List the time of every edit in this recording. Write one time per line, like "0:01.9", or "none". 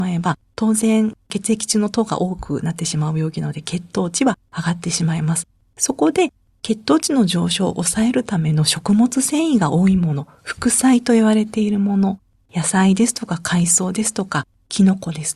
none